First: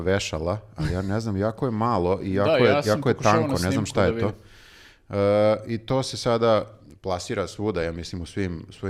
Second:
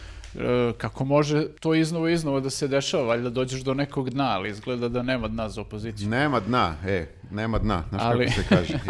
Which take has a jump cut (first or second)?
second